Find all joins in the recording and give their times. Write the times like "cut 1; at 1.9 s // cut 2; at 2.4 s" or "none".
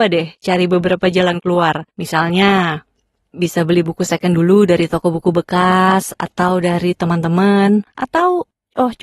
cut 1; at 1.9 s